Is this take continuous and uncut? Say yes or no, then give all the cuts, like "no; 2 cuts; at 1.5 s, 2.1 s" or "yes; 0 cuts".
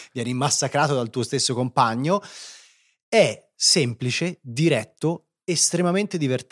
yes; 0 cuts